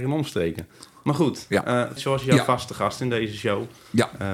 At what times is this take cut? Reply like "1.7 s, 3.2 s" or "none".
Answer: 2.0 s